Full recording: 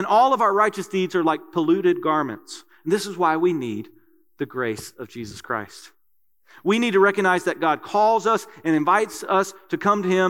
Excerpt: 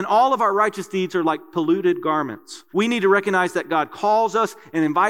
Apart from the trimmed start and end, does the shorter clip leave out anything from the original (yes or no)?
yes